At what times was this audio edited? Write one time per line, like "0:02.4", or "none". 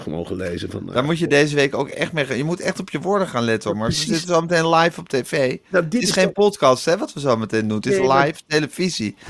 none